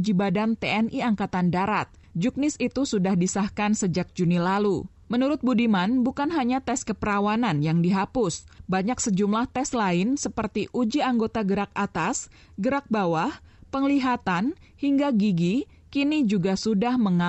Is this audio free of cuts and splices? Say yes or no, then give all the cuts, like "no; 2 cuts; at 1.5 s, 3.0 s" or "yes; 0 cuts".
yes; 0 cuts